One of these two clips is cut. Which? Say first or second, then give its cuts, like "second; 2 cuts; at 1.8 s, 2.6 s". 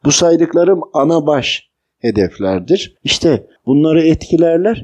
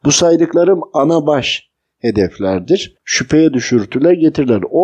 second; 1 cut; at 3.0 s